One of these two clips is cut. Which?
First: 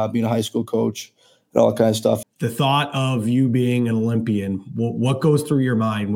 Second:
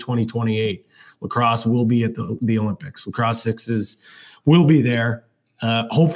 first; 1 cut; at 2.2 s

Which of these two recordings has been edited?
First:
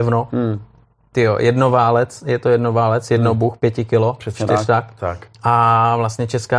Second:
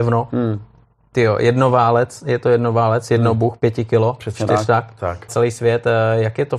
second; 1 cut; at 5.3 s

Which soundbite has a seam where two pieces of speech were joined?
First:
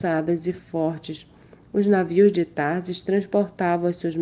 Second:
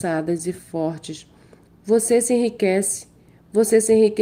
second; 1 cut; at 1.6 s

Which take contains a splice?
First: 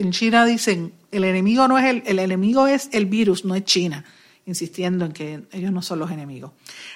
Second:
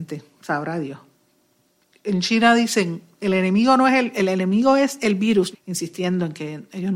second; 1 cut; at 5.5 s

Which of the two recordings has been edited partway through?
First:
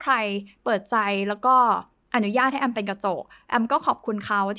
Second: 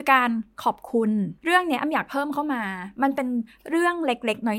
second; 1 cut; at 1.4 s

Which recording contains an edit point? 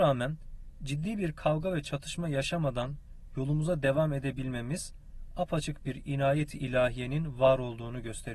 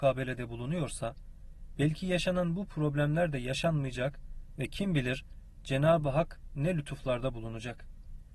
second; 1 cut; at 1.7 s

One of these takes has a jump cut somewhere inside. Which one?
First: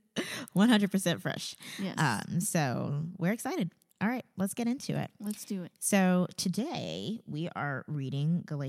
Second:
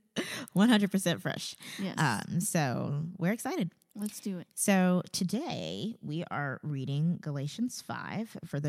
second; 1 cut; at 3.9 s

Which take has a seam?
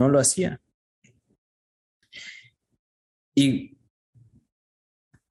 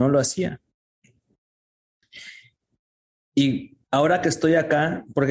second; 1 cut; at 3.8 s

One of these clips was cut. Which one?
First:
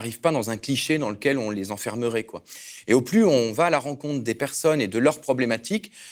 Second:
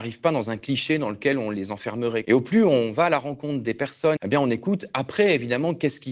second; 2 cuts; at 2.2 s, 4.2 s

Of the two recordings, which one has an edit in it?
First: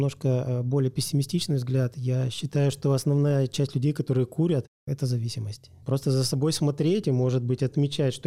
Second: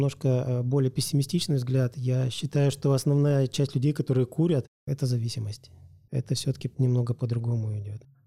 first; 1 cut; at 5.8 s

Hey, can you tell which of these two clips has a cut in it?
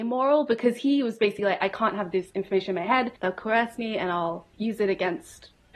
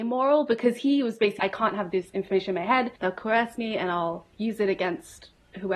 second; 1 cut; at 1.4 s

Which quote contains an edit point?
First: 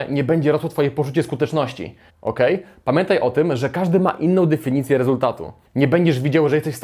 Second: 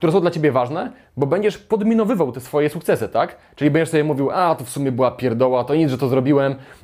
first; 2 cuts; at 2.1 s, 5.6 s

